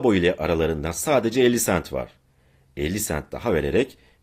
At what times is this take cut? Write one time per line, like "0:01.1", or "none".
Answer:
none